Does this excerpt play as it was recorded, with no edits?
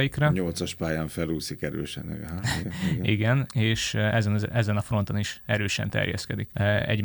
yes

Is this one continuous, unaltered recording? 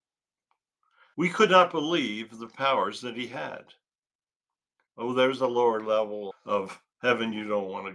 no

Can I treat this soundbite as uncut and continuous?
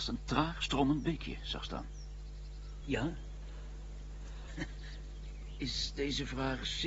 no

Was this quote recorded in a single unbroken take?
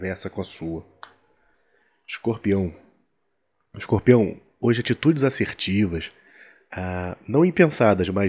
yes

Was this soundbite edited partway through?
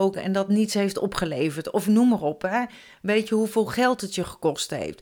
no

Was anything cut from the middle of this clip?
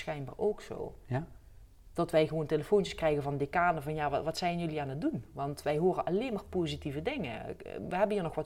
no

